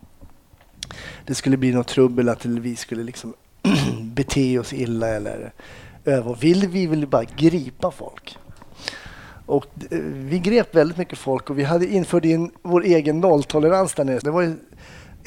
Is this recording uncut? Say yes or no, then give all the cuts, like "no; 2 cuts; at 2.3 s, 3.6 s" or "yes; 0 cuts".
no; 1 cut; at 14.2 s